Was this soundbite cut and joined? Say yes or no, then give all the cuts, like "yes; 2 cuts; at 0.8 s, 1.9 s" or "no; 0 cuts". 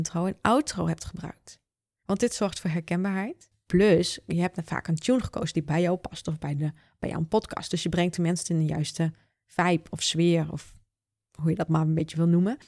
no; 0 cuts